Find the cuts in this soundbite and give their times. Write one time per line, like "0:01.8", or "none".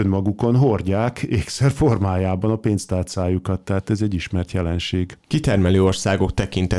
none